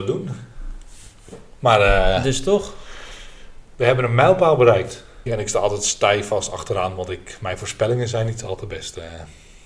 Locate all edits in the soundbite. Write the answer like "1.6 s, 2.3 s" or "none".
3.7 s, 5.3 s

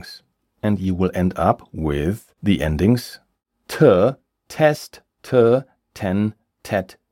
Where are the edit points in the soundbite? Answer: none

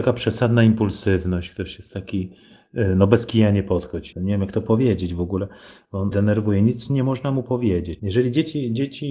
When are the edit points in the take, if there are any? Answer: 6.1 s, 8.0 s

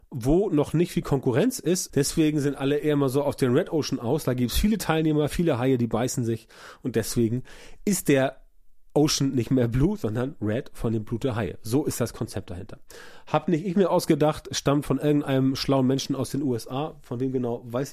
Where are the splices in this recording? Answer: 1.9 s

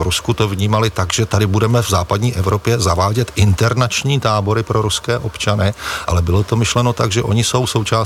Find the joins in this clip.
none

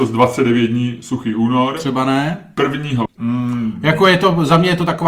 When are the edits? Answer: 3.1 s

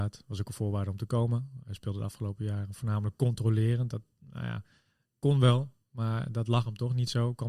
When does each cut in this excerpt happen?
none

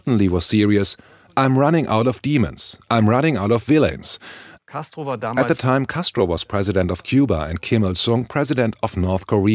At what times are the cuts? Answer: 4.6 s

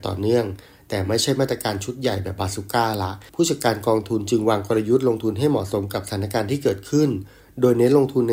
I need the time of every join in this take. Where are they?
3.3 s

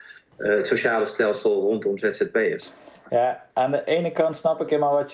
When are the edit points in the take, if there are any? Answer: none

